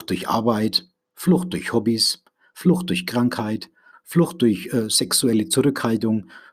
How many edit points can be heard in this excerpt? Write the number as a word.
one